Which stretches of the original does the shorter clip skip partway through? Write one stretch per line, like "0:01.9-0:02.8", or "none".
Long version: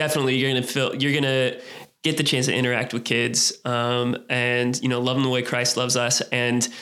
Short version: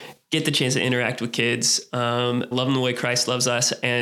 0:04.2-0:05.0

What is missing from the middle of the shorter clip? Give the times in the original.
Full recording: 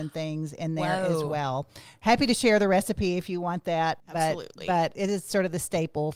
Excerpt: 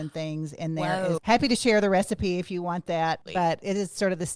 0:01.2-0:02.0
0:04.0-0:04.6

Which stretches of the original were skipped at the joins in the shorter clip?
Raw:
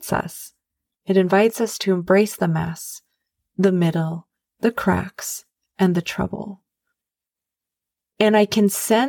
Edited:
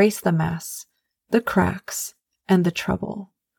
0:03.3-0:04.5

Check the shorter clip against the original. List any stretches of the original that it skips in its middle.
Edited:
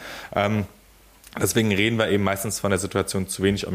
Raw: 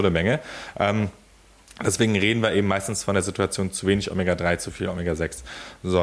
none

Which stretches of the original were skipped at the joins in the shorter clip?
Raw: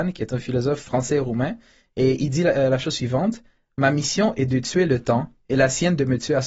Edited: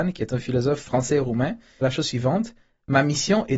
0:01.8-0:02.7

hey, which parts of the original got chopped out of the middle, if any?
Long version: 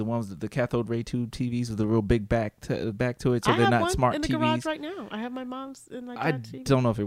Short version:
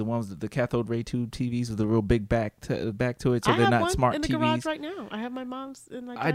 none

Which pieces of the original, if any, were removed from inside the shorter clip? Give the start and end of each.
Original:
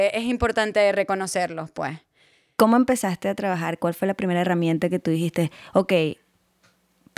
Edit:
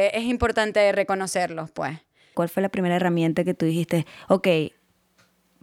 0:02.3-0:03.8

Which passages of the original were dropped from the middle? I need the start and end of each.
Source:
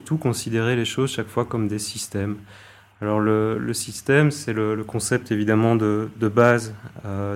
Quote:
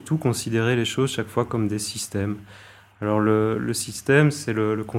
none

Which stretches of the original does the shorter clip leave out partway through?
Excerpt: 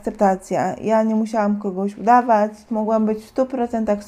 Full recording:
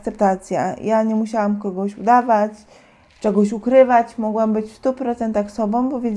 0:02.7-0:04.2

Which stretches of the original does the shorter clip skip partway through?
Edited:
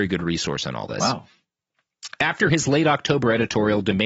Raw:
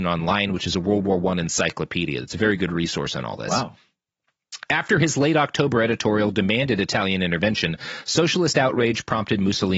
none

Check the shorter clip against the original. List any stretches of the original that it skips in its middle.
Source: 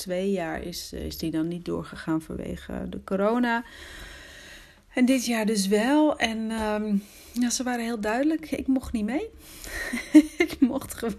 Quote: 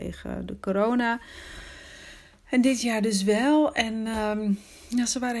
none

